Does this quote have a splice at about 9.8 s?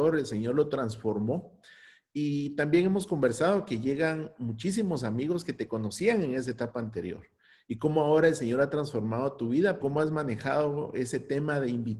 yes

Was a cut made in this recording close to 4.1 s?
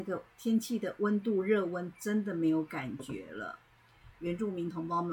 yes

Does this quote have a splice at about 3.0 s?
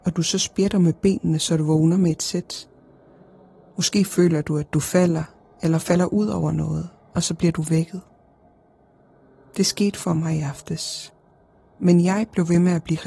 no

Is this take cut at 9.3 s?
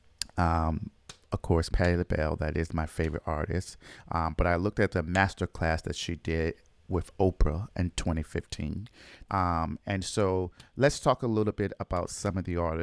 yes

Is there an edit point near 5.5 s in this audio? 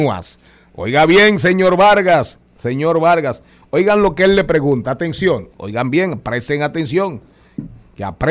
yes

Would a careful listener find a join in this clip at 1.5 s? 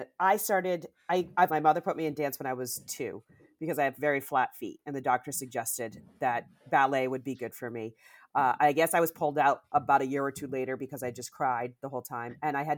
yes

